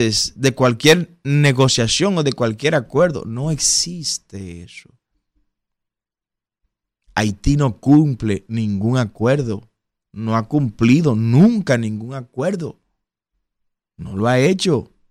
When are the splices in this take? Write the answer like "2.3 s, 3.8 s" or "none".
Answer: none